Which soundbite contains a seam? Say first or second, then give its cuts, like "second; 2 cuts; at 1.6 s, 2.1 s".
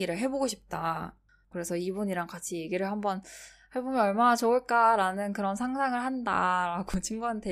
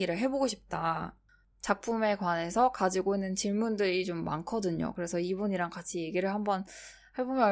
first; 1 cut; at 1.5 s